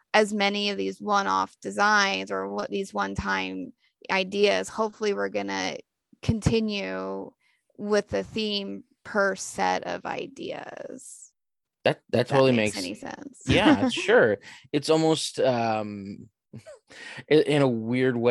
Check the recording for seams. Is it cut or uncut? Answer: uncut